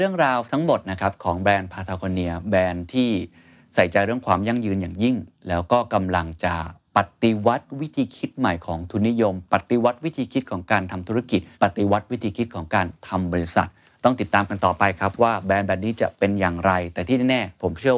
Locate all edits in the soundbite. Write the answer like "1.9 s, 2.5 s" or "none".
11.5 s